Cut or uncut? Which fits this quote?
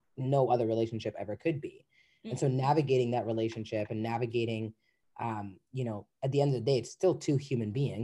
uncut